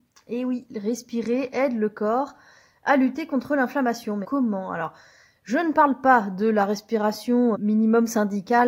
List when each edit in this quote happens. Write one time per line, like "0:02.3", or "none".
0:04.2
0:07.5